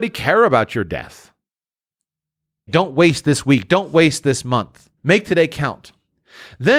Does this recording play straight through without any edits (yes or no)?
no